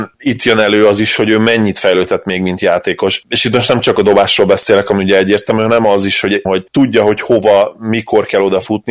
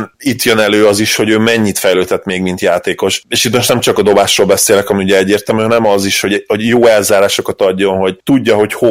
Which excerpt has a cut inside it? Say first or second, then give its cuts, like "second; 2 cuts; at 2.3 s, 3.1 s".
first; 1 cut; at 6.4 s